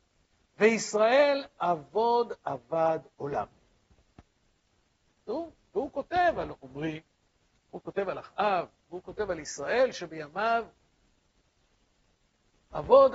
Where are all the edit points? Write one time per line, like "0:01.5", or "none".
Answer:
0:05.6